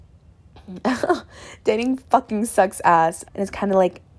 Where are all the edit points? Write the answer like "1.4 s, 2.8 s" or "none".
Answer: 3.2 s

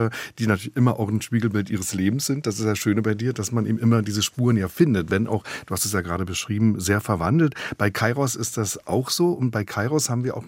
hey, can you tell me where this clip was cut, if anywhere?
none

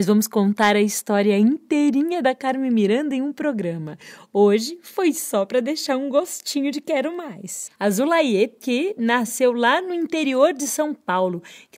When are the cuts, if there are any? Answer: 7.7 s

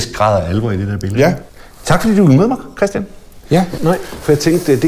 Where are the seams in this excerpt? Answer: 3.8 s

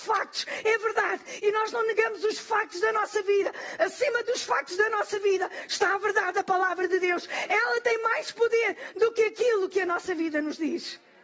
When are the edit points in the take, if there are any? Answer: 3.8 s

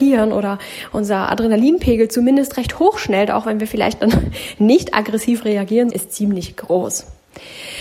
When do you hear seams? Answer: 5.9 s

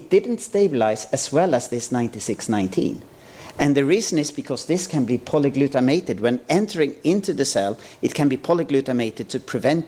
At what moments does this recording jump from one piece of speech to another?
none

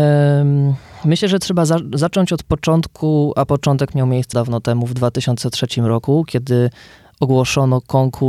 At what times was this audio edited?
4.3 s

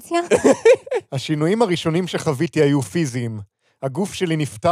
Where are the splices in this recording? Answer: none

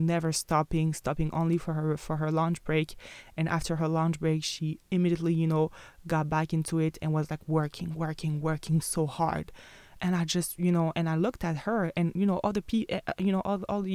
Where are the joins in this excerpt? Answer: none

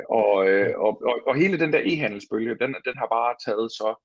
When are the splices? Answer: none

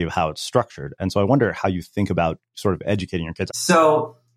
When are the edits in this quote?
3.5 s

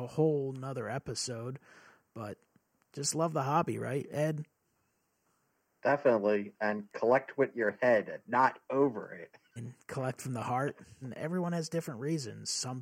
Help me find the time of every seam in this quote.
9.6 s, 11.0 s

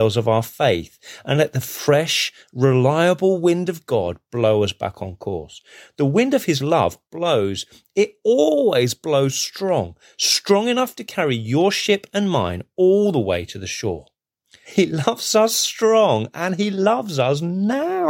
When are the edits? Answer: 7.1 s, 14.6 s

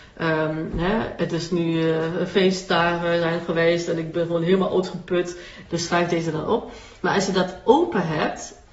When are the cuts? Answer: 5.7 s

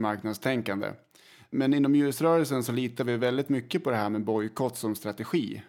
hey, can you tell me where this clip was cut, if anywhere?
none

